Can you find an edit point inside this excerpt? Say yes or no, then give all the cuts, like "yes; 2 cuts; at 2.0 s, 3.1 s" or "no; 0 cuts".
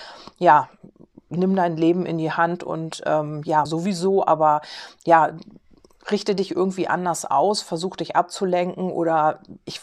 yes; 1 cut; at 3.7 s